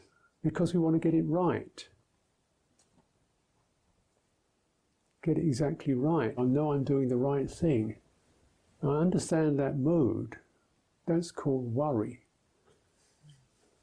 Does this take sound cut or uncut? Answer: cut